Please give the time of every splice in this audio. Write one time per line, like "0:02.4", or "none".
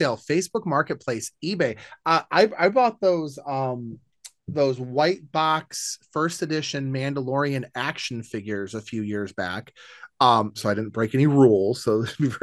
0:10.6